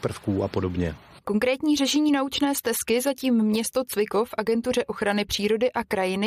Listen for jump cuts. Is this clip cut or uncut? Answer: uncut